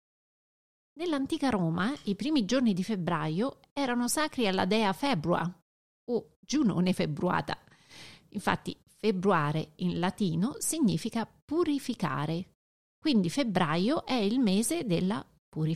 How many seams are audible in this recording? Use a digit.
0